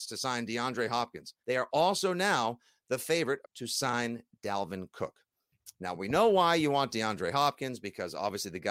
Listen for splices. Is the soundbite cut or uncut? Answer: cut